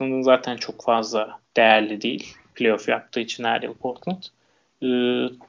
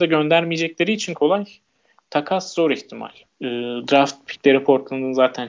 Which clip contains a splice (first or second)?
second